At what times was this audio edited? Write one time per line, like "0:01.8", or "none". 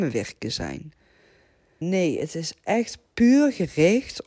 0:01.8